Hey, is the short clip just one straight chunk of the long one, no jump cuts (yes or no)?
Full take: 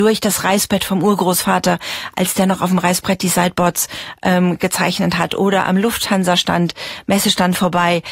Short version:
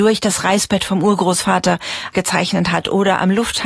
no